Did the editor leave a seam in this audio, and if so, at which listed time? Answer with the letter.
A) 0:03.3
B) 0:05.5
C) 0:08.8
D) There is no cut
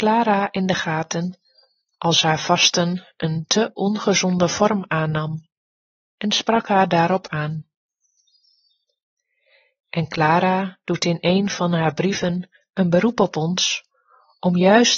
D